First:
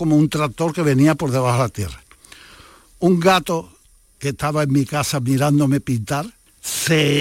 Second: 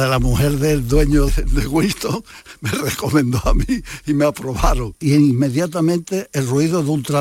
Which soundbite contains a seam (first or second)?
second